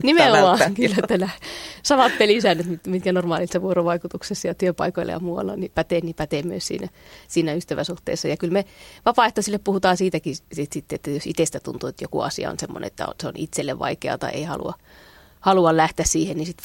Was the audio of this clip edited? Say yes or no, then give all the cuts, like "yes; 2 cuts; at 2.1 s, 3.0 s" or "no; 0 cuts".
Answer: no; 0 cuts